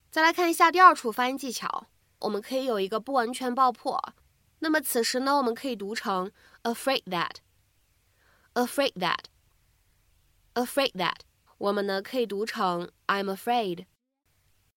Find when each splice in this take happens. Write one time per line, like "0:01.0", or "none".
0:02.2
0:11.5